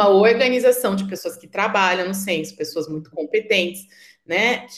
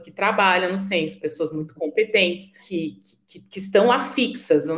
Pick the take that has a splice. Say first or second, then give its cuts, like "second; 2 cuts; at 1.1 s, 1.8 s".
second; 1 cut; at 2.6 s